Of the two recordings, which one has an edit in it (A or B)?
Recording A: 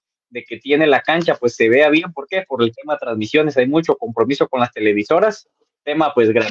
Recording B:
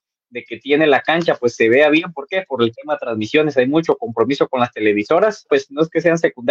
B